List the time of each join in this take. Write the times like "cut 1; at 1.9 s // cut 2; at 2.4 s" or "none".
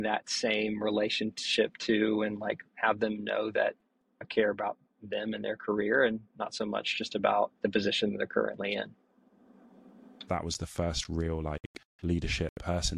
cut 1; at 2.7 s // cut 2; at 7.6 s // cut 3; at 10.3 s